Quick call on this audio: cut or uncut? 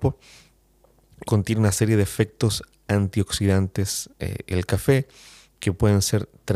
cut